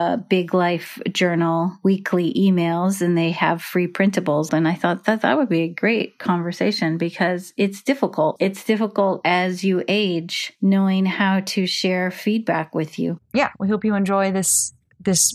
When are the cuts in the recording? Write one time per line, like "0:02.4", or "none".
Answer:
0:04.5
0:13.2